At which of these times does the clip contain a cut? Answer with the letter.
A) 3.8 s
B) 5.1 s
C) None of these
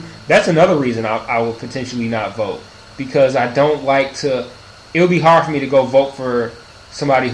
C